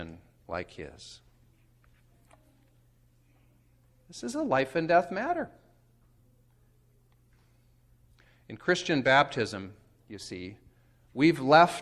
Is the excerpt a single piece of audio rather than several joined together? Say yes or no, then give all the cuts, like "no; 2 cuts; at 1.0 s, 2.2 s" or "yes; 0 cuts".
yes; 0 cuts